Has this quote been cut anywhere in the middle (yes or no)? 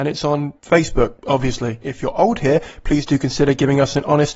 yes